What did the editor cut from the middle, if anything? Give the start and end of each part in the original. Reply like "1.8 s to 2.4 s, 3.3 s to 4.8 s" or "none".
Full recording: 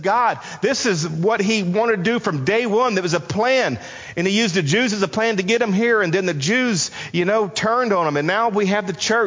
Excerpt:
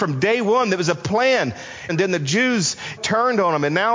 4.1 s to 6.0 s, 7.1 s to 7.5 s